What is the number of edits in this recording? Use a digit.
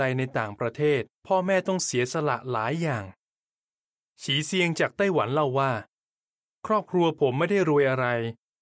1